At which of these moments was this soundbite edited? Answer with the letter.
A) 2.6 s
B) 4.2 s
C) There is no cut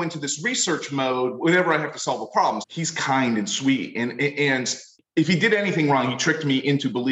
A